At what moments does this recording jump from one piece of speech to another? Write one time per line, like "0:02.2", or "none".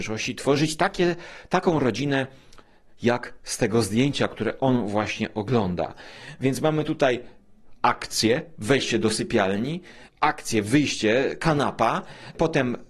none